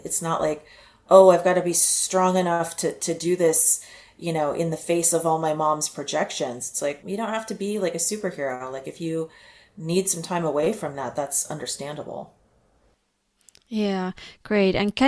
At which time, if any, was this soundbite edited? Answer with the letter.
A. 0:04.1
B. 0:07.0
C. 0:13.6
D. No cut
B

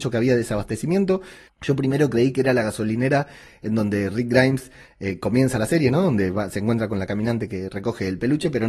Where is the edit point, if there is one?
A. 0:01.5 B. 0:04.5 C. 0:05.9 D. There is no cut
A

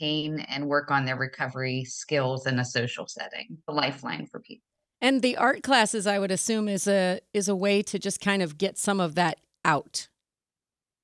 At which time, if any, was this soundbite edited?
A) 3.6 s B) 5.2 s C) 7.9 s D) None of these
A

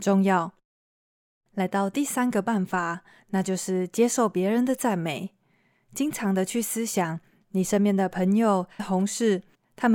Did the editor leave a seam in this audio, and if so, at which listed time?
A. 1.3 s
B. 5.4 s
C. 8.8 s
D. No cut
C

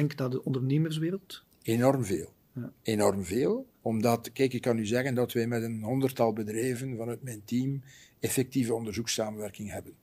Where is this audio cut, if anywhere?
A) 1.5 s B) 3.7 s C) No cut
B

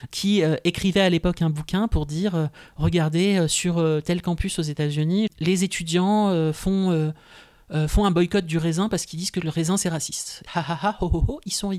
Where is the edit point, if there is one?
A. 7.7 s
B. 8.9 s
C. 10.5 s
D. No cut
C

